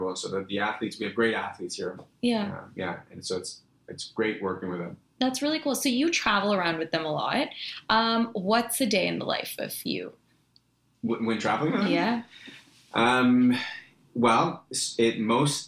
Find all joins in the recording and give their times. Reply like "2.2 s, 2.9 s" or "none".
none